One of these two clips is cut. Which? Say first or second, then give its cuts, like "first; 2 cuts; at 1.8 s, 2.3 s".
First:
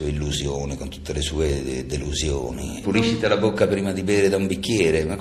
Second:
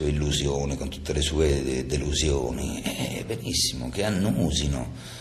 first; 1 cut; at 2.8 s